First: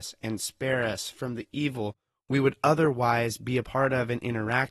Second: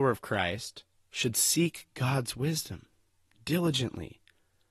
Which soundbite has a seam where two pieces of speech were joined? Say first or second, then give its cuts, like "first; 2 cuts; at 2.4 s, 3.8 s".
second; 1 cut; at 0.9 s